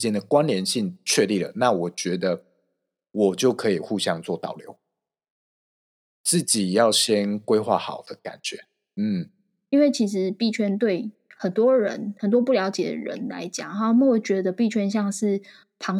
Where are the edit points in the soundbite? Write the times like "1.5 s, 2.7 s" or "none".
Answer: none